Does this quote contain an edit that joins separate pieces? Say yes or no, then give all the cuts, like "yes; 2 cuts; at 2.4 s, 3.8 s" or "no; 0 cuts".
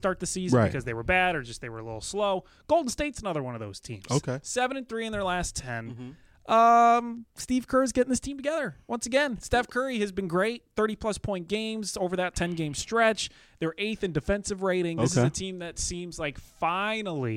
no; 0 cuts